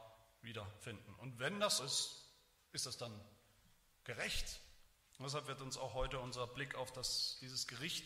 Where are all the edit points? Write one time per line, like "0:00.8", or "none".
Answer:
0:01.8
0:05.0